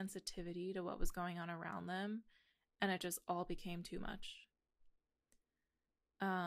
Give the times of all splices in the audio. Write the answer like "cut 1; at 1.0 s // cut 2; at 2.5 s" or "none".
none

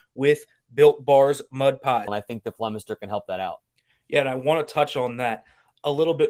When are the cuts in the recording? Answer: cut 1; at 2.1 s

